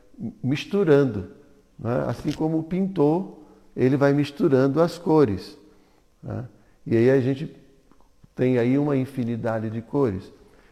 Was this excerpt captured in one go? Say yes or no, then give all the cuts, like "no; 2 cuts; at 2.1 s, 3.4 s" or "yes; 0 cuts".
yes; 0 cuts